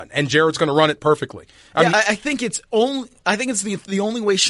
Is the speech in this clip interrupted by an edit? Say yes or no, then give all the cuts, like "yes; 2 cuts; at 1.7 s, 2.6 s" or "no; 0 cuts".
yes; 1 cut; at 1.9 s